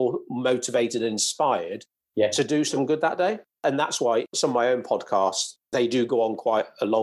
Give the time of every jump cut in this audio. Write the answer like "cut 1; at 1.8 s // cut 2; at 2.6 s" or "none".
none